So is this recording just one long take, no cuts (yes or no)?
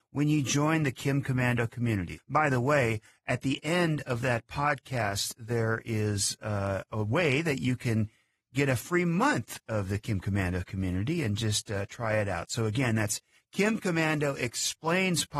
no